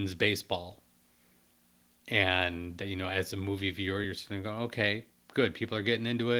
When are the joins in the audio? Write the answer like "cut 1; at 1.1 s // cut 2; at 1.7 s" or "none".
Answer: none